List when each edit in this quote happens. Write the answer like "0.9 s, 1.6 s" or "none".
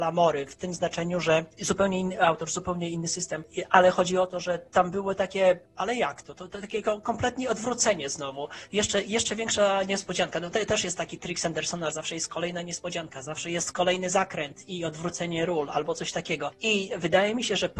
10.5 s, 11.9 s